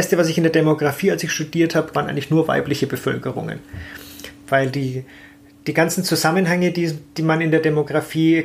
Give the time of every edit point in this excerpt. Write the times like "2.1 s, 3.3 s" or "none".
1.9 s